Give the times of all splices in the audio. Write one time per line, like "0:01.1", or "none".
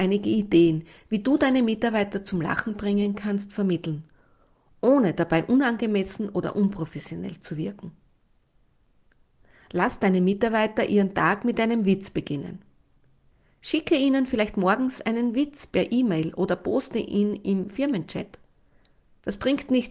none